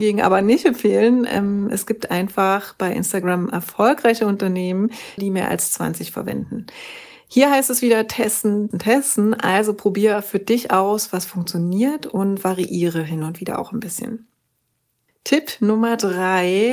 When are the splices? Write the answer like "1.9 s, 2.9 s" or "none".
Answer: 5.2 s, 8.7 s